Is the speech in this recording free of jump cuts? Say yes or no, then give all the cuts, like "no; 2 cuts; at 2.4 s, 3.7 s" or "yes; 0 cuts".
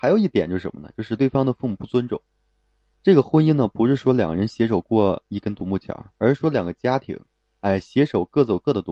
no; 1 cut; at 1.2 s